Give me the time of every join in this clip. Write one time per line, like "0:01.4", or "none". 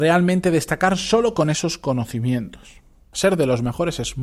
0:03.1